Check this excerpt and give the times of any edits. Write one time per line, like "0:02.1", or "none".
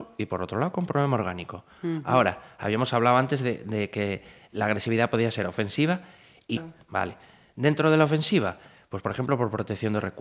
0:06.6